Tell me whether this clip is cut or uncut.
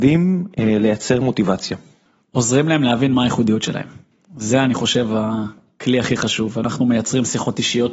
uncut